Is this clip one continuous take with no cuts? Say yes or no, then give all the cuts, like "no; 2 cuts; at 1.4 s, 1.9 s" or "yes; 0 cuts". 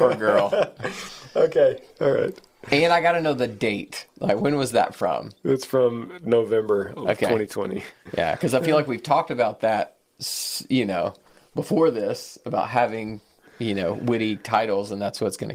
yes; 0 cuts